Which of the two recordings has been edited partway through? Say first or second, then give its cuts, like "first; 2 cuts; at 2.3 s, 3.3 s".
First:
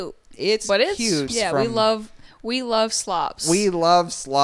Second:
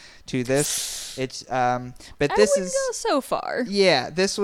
first; 1 cut; at 1.3 s